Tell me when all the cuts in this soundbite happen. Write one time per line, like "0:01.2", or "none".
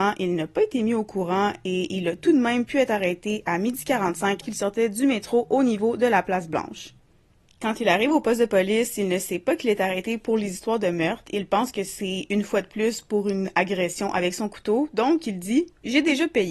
0:04.4